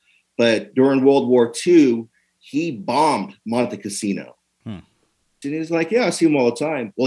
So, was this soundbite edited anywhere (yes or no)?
yes